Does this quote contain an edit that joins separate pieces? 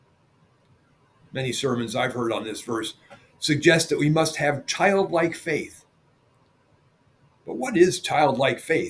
no; 0 cuts

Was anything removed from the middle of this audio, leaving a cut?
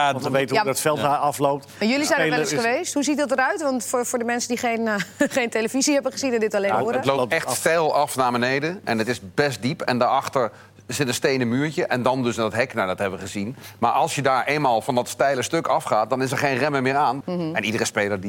yes; 1 cut; at 17.2 s

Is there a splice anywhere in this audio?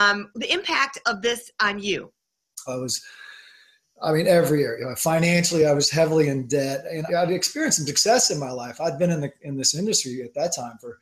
yes; 2 cuts; at 2.7 s, 7.1 s

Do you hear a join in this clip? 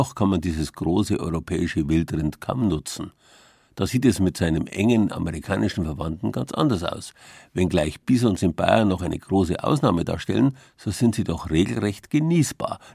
no; 0 cuts

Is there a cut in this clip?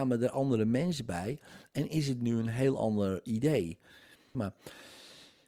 yes; 1 cut; at 4.3 s

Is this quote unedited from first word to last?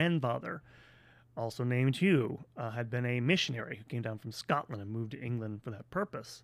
yes; 0 cuts

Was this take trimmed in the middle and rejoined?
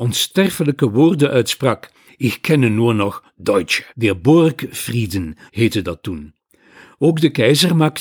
yes; 3 cuts; at 2.1 s, 3.9 s, 5.5 s

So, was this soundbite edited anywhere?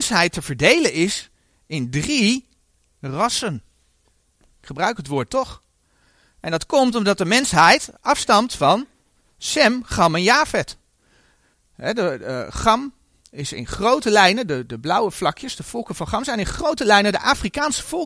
no; 0 cuts

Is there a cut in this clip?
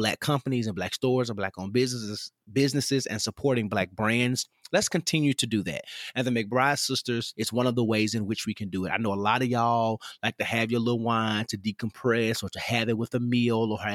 yes; 1 cut; at 7.3 s

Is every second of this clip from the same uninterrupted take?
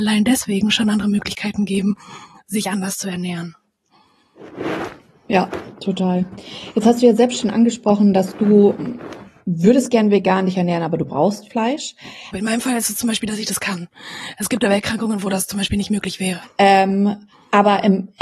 no; 2 cuts; at 12.3 s, 16.4 s

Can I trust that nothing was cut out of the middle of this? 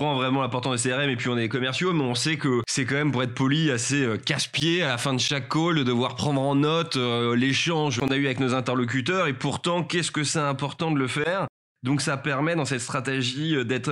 yes; 0 cuts

